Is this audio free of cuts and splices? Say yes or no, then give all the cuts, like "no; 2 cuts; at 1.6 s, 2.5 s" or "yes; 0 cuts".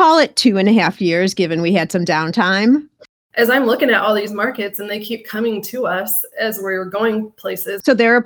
no; 1 cut; at 3.0 s